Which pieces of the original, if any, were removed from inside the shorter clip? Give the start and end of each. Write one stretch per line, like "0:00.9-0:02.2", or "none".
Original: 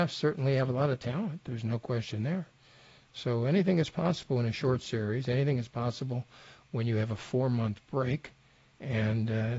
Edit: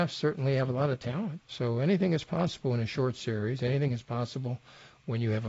0:01.4-0:03.1